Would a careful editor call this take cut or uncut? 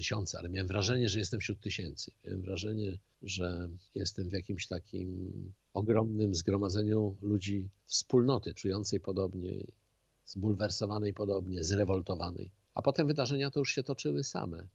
cut